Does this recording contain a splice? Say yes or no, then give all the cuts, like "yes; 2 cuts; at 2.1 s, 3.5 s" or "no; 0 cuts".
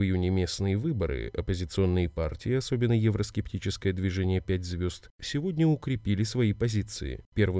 no; 0 cuts